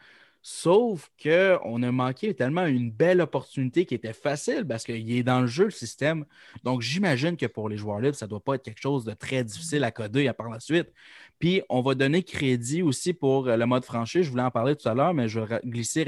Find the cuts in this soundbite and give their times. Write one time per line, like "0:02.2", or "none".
none